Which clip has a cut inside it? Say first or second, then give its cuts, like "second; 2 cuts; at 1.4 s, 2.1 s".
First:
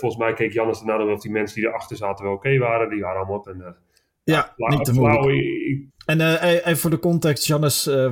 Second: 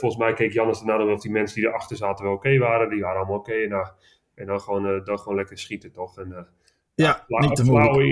first; 2 cuts; at 3.4 s, 5.9 s